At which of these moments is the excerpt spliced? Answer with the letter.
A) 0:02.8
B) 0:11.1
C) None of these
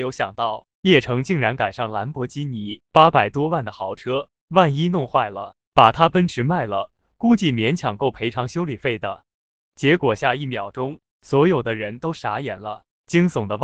A